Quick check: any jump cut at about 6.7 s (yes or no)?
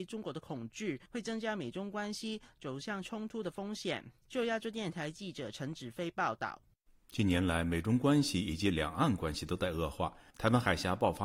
no